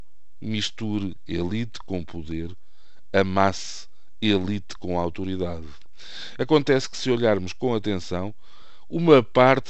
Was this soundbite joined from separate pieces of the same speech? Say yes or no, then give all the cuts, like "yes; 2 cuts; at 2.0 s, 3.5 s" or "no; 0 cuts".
no; 0 cuts